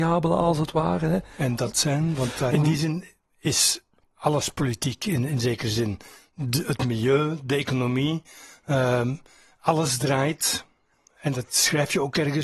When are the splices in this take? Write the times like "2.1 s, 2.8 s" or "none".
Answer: 2.5 s